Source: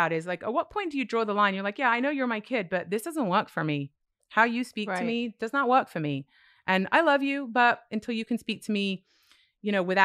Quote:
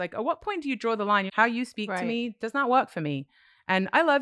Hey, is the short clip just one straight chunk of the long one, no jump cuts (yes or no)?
no